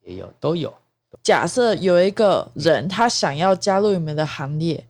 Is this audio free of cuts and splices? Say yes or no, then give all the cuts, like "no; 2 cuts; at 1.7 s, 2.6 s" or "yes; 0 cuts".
no; 1 cut; at 1.1 s